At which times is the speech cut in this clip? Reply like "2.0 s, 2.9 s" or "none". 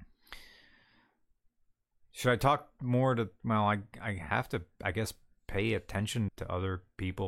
6.3 s

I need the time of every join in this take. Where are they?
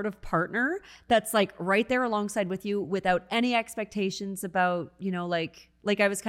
none

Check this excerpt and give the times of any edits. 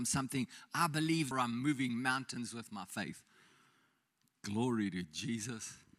1.3 s

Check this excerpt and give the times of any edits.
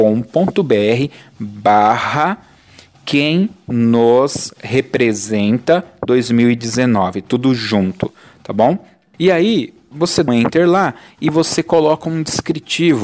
9.1 s, 10.3 s

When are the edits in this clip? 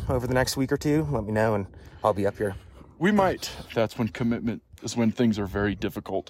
3.7 s, 4.8 s

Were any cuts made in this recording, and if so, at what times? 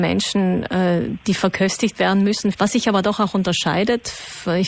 2.5 s

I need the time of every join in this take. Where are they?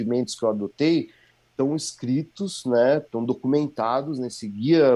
none

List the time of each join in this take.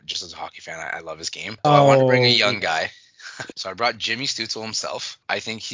1.6 s, 3.5 s

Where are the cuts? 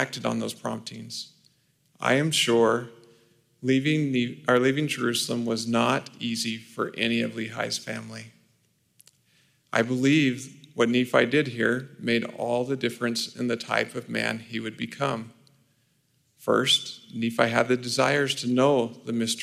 1.8 s

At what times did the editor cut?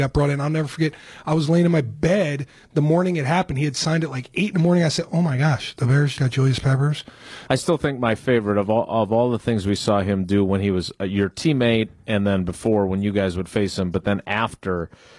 6.2 s, 7.5 s

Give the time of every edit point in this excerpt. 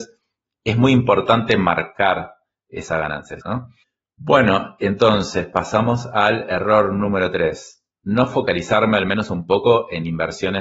3.4 s

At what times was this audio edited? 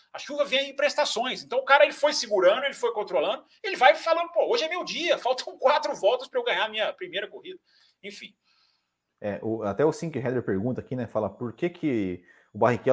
none

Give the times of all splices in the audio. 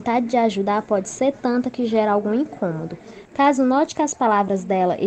3.3 s

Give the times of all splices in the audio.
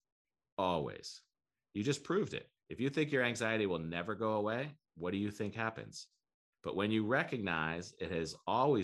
2.6 s, 6.5 s

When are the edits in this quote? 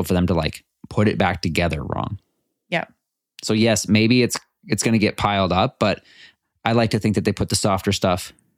none

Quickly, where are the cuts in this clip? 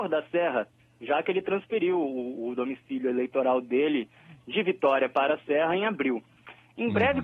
none

